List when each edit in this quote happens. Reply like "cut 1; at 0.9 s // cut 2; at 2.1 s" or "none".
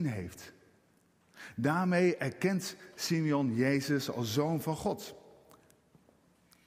none